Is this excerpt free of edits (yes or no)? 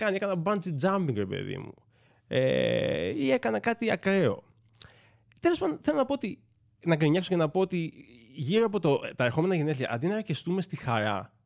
yes